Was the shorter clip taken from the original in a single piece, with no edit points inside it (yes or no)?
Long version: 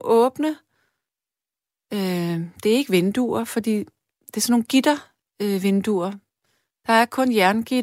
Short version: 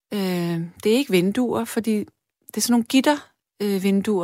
yes